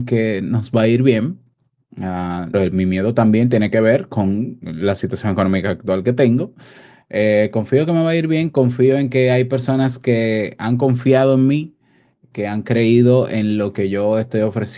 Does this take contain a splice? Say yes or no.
yes